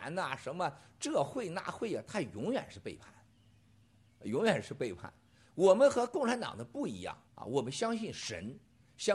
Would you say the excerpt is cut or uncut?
cut